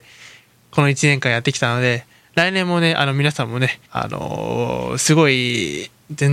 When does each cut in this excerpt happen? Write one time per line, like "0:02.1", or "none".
0:03.9